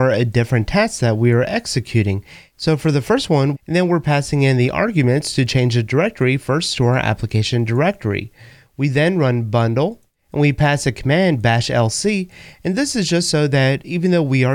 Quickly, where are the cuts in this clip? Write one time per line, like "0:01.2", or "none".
0:03.5